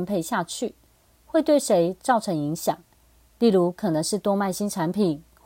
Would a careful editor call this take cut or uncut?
cut